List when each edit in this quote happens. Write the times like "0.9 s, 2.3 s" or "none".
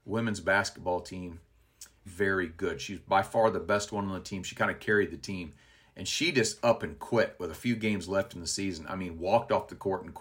2.1 s